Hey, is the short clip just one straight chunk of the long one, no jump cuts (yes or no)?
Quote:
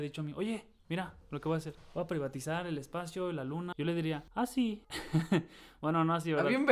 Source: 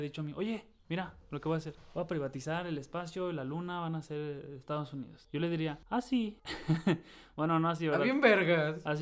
no